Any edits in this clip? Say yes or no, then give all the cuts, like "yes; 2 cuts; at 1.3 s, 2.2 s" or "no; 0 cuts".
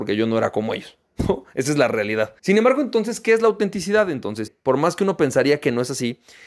yes; 2 cuts; at 2.4 s, 4.5 s